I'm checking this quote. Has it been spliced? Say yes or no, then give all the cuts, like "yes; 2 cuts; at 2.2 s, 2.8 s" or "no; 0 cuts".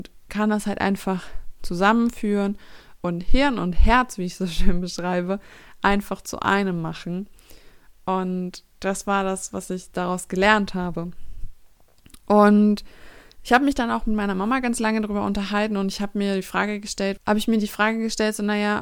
yes; 1 cut; at 17.2 s